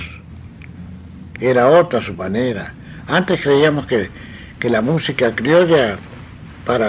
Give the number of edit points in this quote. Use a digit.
1